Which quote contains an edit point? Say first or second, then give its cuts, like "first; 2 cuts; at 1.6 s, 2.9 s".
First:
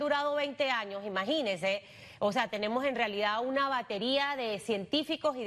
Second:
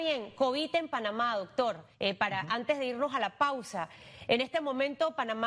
second; 1 cut; at 1.9 s